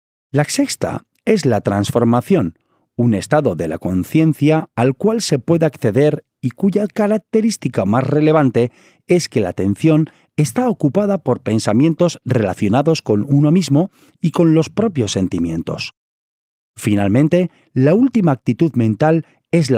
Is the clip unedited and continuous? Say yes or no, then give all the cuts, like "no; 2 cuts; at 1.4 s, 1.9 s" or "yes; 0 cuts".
yes; 0 cuts